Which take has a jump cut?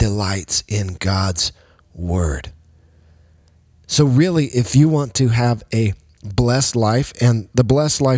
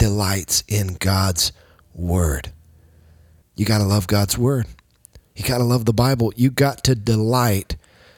second; 1 cut; at 3.4 s

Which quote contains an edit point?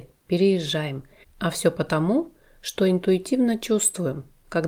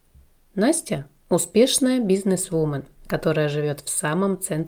first; 1 cut; at 1.2 s

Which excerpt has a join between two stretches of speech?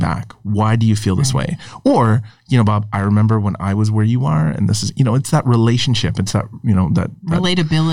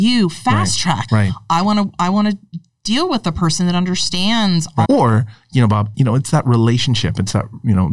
second; 3 cuts; at 1.1 s, 4.9 s, 5.9 s

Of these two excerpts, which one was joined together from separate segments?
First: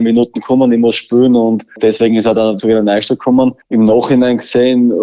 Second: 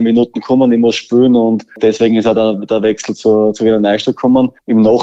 first; 1 cut; at 2.6 s

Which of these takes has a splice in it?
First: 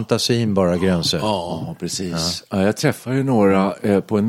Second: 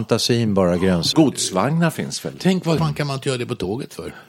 second; 2 cuts; at 1.1 s, 2.8 s

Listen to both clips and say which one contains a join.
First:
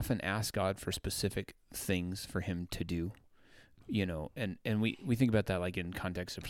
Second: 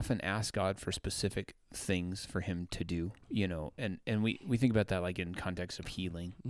second; 1 cut; at 3.2 s

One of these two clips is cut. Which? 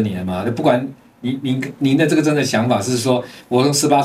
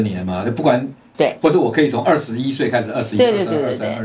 second; 1 cut; at 1.1 s

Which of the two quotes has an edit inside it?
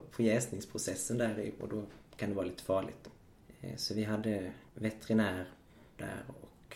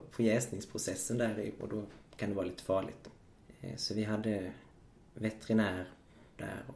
first; 1 cut; at 4.7 s

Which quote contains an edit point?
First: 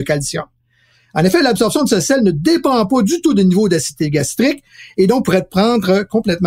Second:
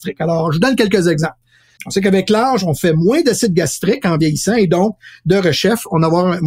second; 1 cut; at 1.8 s

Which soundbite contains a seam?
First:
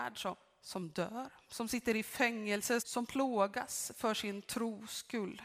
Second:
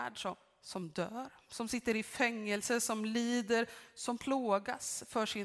first; 1 cut; at 2.8 s

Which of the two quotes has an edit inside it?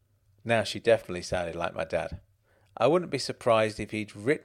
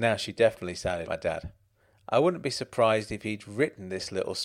second; 1 cut; at 1.1 s

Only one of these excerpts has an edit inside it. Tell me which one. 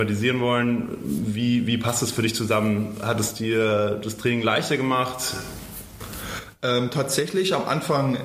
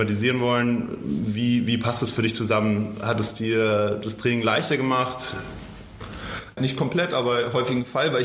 second; 1 cut; at 6.6 s

